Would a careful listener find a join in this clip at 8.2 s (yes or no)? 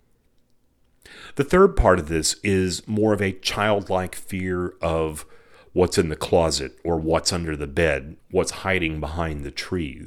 yes